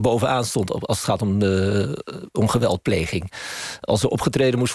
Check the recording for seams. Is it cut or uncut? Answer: uncut